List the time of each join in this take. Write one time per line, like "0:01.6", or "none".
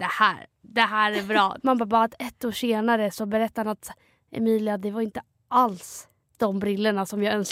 0:01.6